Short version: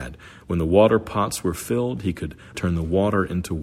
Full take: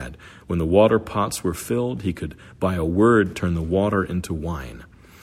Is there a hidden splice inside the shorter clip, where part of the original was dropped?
yes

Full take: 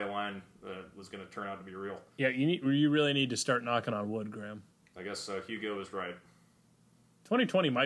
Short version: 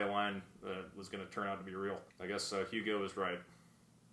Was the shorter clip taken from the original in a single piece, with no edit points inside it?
no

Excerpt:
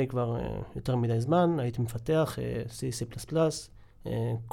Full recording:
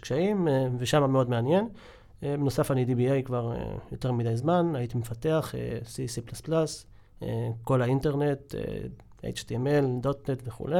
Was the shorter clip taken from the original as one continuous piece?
yes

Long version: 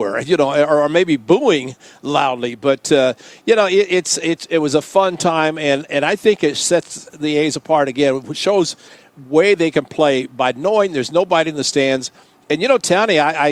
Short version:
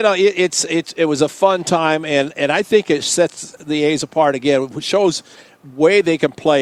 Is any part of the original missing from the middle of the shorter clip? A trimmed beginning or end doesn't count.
no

